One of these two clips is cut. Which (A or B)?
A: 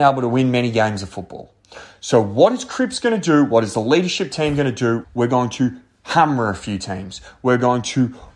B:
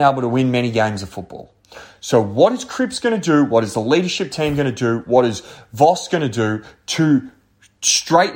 A